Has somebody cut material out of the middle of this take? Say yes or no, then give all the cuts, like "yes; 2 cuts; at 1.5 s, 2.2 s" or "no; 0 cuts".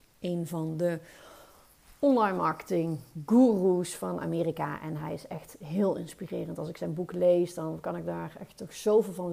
no; 0 cuts